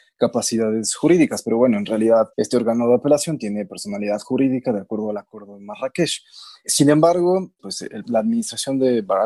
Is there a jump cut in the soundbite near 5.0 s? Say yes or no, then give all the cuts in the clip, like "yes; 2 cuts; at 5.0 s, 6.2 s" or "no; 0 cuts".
no; 2 cuts; at 2.3 s, 7.6 s